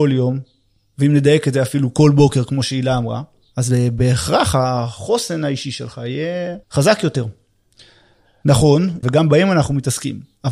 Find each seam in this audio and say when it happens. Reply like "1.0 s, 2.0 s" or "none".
6.6 s, 9.0 s